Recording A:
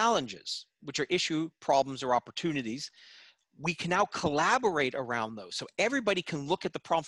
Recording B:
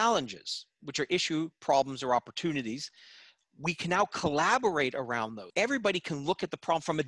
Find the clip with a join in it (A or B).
B